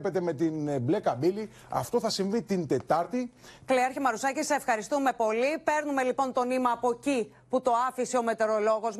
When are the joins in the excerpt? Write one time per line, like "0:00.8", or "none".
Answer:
0:03.6